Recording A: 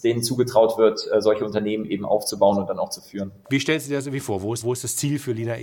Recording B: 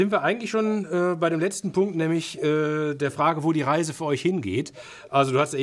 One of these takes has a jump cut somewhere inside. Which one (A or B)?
A